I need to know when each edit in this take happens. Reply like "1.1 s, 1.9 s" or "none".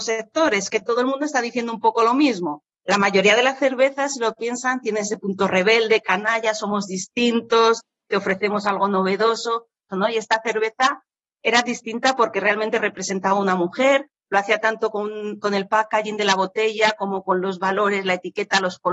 9.9 s